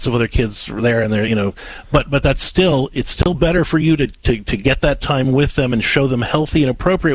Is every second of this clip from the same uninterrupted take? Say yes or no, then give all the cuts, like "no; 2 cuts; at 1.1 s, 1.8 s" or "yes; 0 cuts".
yes; 0 cuts